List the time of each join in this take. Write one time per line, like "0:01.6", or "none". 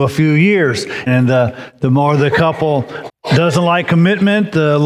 0:01.1
0:03.1